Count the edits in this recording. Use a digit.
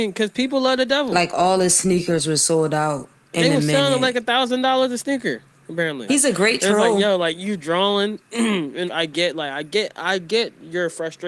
2